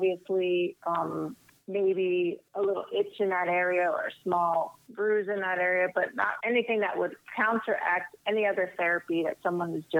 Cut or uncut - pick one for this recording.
cut